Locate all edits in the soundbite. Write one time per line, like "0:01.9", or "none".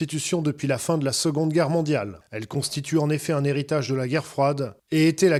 none